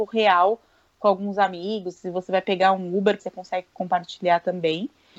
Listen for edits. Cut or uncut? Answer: cut